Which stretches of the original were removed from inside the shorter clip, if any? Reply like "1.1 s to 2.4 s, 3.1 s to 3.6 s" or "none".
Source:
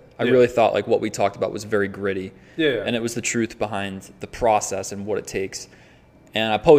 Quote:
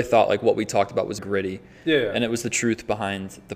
1.6 s to 1.9 s